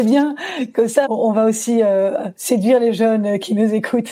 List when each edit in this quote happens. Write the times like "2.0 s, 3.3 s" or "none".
none